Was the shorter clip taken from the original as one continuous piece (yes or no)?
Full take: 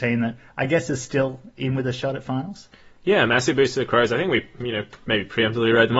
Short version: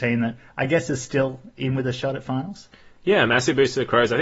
yes